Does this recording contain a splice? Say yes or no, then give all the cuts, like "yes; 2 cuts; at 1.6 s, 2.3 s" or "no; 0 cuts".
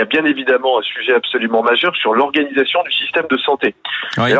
no; 0 cuts